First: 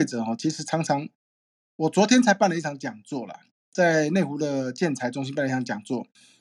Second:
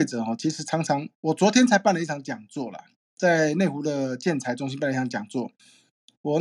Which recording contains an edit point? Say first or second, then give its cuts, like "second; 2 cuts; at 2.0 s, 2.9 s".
second; 1 cut; at 1.1 s